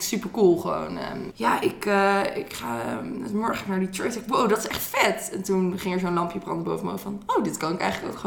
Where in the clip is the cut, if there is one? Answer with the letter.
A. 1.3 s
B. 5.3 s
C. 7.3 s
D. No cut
A